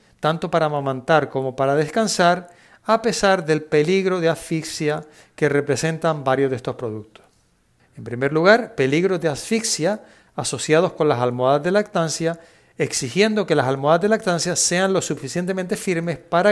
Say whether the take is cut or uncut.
cut